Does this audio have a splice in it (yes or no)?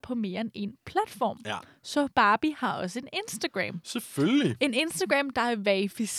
no